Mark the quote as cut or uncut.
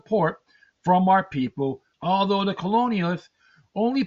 cut